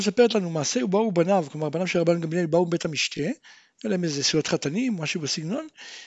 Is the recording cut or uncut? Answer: uncut